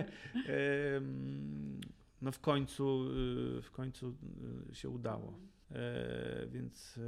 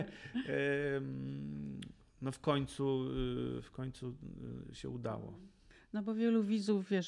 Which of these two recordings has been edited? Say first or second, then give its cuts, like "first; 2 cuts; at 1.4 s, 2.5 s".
first; 1 cut; at 5.6 s